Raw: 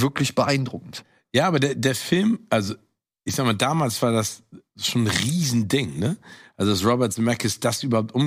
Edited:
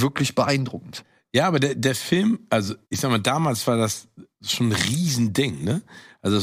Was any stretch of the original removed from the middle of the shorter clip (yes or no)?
yes